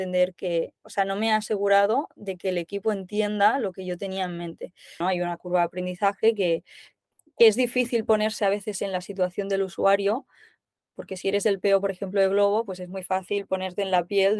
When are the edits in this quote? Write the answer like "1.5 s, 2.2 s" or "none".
5.0 s